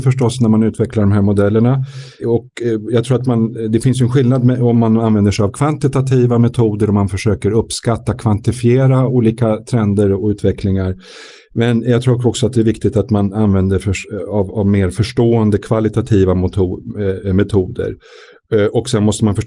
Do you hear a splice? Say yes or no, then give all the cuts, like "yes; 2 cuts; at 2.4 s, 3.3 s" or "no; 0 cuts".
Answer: no; 0 cuts